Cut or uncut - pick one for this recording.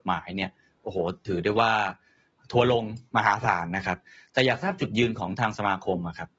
uncut